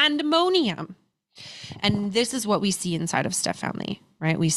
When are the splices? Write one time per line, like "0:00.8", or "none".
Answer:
none